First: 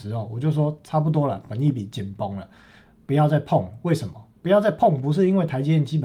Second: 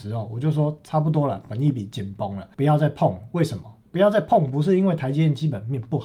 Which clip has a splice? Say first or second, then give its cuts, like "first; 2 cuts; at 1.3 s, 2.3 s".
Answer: second; 1 cut; at 2.5 s